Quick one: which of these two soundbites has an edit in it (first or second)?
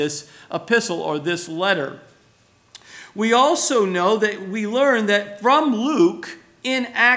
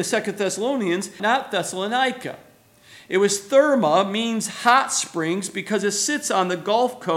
second